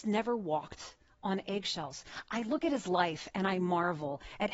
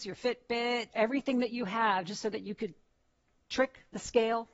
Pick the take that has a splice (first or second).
second